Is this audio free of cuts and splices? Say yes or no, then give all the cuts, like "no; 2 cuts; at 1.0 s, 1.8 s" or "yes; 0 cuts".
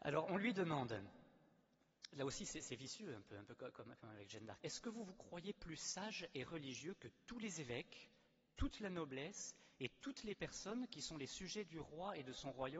no; 1 cut; at 4.6 s